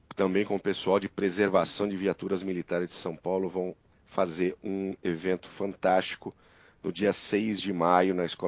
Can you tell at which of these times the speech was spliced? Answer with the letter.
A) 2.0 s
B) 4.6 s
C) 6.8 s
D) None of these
D